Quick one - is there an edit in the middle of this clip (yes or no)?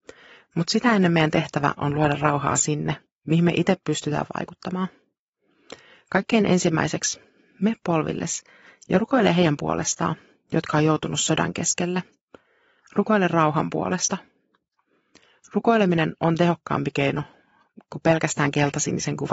no